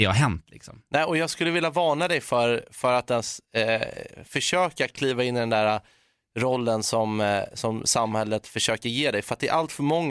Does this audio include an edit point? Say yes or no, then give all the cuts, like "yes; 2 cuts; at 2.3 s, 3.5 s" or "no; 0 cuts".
no; 0 cuts